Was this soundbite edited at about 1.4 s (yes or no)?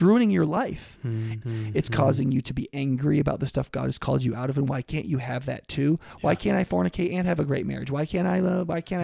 yes